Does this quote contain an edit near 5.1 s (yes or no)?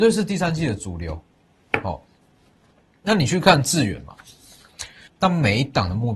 yes